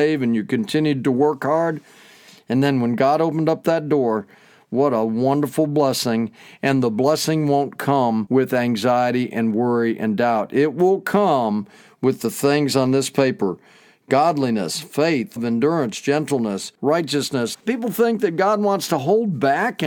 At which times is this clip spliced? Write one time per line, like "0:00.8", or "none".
0:15.4
0:17.5